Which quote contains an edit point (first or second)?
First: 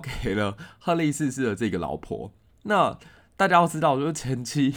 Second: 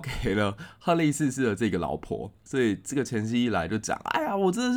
second